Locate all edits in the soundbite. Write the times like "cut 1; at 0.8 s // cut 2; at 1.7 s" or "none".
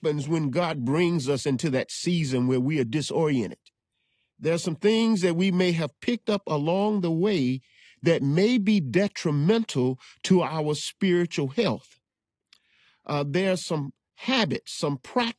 cut 1; at 4.3 s